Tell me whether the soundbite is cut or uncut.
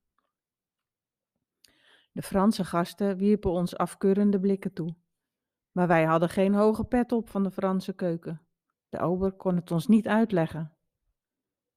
cut